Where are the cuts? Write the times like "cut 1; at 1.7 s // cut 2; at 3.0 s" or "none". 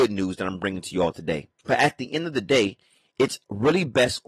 cut 1; at 1.6 s